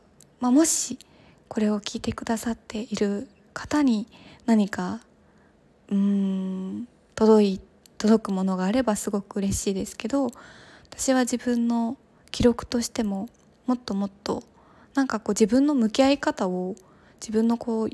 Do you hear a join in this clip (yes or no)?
no